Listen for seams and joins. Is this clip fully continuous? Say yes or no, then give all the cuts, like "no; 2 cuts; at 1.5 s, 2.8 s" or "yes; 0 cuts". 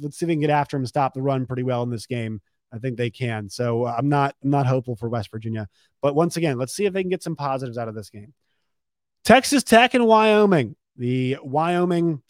yes; 0 cuts